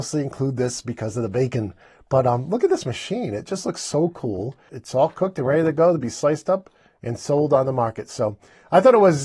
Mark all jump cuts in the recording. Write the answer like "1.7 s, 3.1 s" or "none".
4.7 s